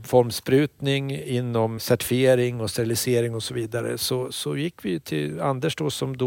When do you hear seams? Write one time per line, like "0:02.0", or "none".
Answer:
0:01.8